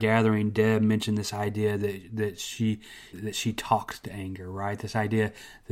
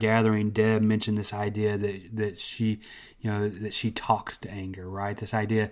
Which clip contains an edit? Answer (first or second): first